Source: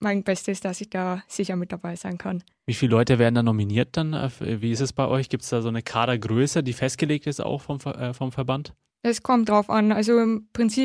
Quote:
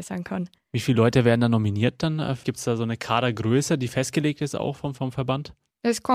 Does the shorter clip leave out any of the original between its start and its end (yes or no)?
yes